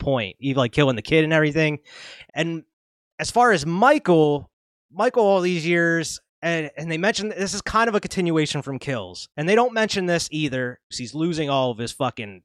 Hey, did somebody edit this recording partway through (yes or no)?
yes